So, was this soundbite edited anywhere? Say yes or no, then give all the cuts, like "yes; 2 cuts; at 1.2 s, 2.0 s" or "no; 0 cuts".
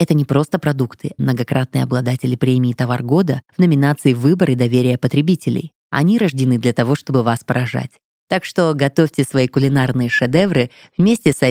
yes; 1 cut; at 1.2 s